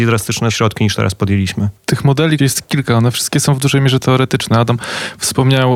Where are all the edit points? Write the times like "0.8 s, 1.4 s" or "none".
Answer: 2.4 s